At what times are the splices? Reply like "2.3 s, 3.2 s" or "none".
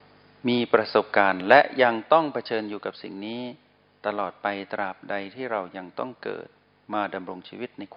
none